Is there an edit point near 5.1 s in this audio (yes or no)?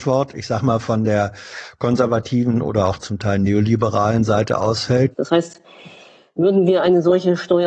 yes